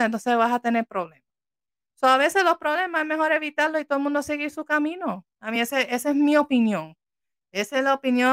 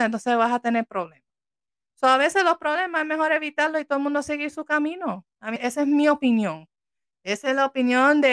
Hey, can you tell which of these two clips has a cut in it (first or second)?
second